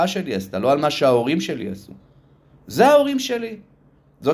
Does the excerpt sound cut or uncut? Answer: uncut